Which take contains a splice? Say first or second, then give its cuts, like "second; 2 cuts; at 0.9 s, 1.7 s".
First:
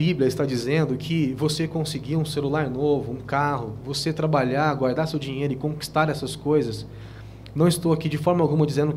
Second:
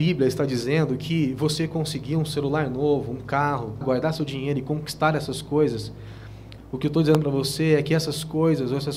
second; 2 cuts; at 3.8 s, 6.6 s